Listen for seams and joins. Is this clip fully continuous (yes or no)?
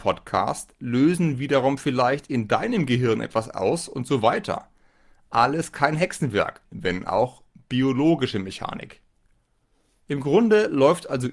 no